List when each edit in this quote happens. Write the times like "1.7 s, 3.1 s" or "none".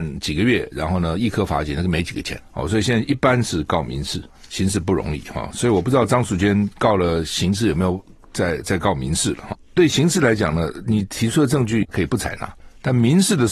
9.7 s, 11.9 s